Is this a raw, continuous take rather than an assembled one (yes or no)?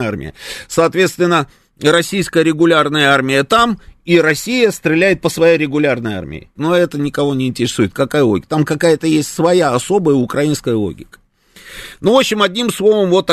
no